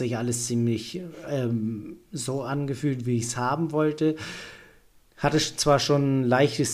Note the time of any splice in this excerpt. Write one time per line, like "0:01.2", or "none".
none